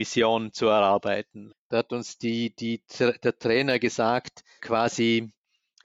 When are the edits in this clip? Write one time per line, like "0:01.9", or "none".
0:01.5
0:04.6